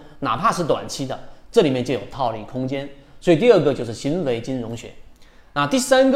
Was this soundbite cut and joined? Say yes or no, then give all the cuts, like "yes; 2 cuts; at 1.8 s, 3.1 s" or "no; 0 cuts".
no; 0 cuts